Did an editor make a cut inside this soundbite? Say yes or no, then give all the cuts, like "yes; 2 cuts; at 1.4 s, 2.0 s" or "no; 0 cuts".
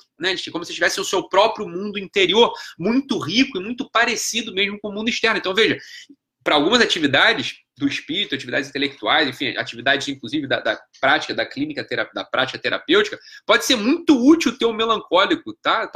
no; 0 cuts